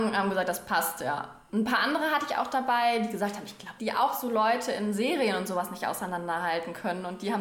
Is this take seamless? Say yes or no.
no